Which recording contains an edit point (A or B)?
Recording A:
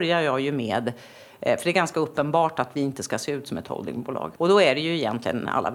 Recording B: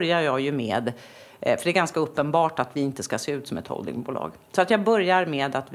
A